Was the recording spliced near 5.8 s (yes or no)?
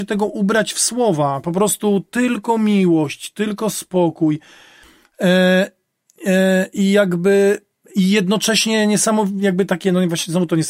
no